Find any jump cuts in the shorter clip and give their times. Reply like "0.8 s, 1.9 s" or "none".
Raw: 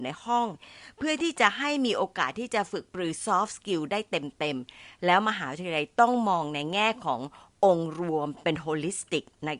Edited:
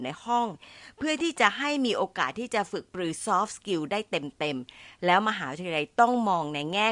none